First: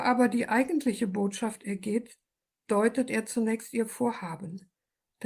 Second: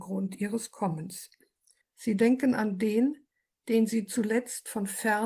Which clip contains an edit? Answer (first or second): second